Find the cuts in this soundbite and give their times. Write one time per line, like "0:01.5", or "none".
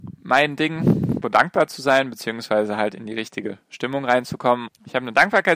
0:01.2
0:04.7

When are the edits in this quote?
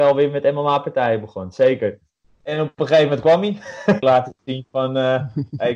0:02.2
0:04.0

